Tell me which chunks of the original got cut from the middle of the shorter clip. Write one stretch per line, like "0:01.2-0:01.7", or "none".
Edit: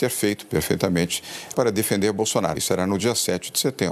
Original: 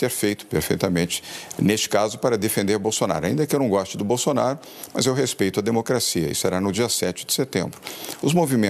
0:01.5-0:02.2
0:03.2-0:06.3